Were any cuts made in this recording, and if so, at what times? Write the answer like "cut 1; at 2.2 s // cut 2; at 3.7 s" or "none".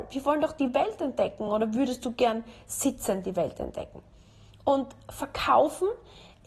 none